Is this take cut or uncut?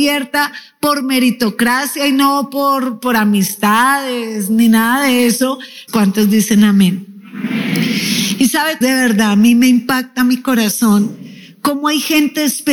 cut